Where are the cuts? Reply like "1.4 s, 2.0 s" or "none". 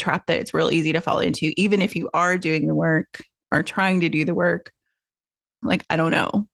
5.6 s

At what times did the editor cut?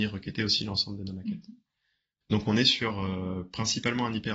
2.2 s

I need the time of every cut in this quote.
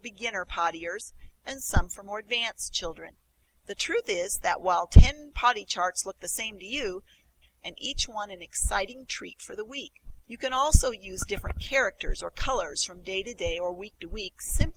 7.4 s, 10.2 s

